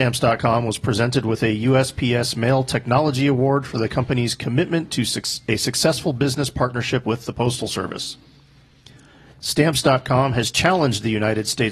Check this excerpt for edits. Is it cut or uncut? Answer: cut